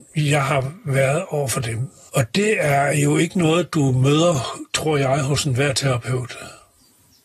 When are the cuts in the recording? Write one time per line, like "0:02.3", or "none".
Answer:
0:02.1